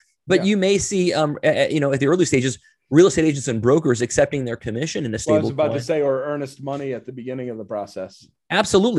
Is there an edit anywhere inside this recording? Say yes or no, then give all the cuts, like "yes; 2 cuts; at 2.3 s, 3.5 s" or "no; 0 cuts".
no; 0 cuts